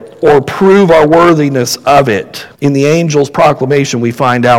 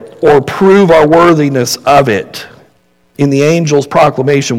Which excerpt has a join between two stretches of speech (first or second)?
first